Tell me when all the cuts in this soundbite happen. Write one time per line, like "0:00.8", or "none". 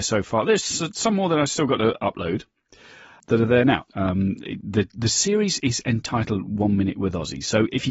0:03.9